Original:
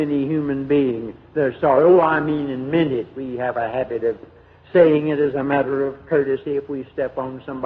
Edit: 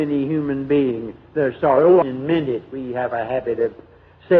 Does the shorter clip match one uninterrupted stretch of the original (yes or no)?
no